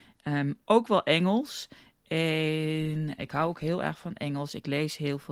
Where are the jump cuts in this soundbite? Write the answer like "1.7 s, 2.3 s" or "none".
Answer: 3.2 s